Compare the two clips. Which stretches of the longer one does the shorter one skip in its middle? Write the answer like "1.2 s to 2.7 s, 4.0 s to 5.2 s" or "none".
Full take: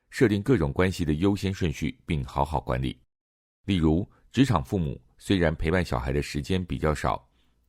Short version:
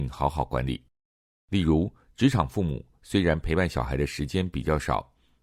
none